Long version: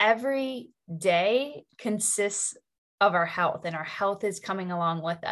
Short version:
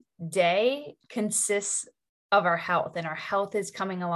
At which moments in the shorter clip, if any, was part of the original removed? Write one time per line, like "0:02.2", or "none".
none